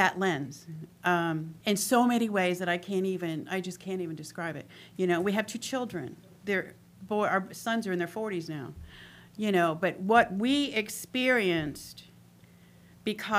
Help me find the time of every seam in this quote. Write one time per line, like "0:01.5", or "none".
0:01.6